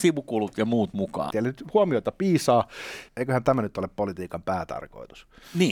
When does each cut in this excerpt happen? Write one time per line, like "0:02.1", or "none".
0:01.3
0:03.1